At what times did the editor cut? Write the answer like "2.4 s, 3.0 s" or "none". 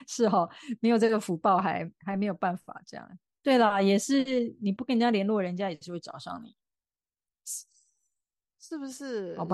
none

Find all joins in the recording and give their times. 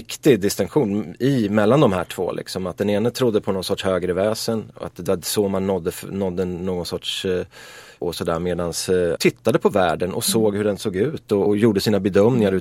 8.0 s, 9.2 s, 11.5 s

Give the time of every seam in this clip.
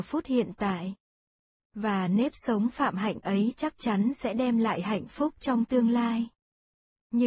none

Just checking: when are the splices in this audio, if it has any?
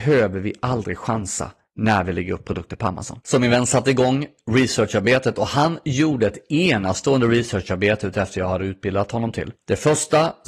none

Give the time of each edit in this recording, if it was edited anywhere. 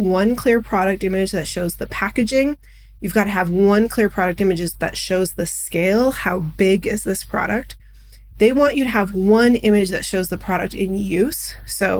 none

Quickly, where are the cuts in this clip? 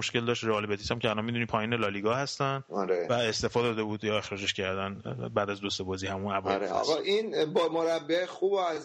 none

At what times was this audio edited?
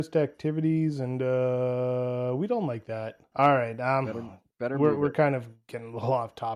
3.3 s

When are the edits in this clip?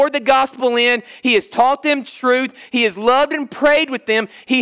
none

